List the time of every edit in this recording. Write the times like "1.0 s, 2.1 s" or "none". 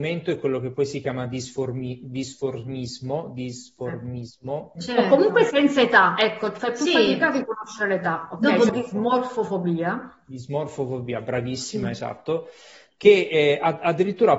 4.8 s, 8.7 s